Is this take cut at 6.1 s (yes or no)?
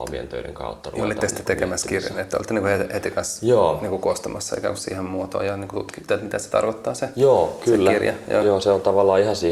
yes